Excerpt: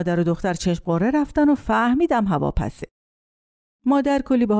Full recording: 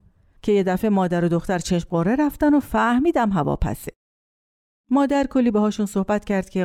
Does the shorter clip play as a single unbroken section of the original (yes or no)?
yes